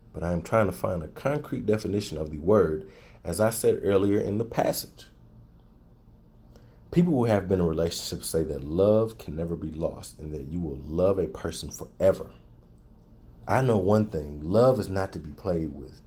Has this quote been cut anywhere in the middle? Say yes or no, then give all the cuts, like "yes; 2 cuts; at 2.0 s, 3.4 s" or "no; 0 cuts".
no; 0 cuts